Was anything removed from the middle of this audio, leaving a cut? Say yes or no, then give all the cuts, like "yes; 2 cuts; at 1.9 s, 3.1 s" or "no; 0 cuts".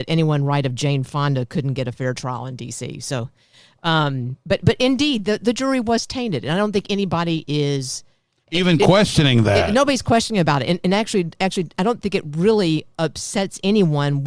no; 0 cuts